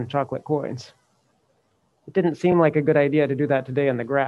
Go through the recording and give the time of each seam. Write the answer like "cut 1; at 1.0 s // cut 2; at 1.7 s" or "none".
none